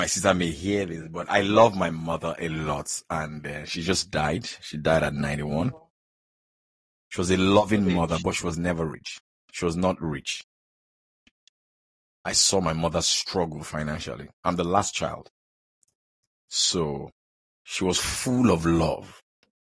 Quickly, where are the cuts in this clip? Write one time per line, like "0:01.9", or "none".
none